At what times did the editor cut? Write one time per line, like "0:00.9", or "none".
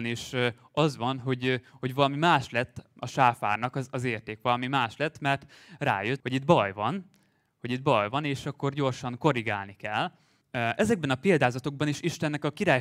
0:06.2
0:10.4